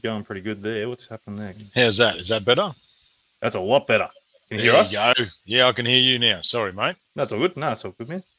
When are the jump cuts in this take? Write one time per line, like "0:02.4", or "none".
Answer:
0:07.0